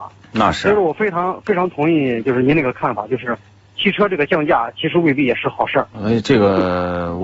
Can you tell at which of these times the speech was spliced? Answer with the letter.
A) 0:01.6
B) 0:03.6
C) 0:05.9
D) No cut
C